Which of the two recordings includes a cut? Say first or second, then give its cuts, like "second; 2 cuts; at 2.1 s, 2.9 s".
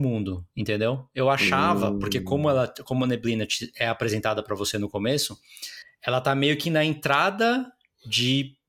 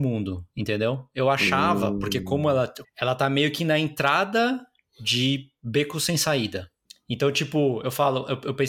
second; 1 cut; at 2.8 s